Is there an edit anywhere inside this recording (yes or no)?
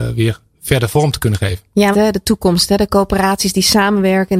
yes